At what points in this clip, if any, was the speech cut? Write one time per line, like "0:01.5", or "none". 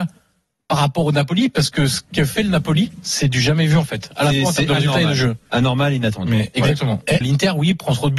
0:07.2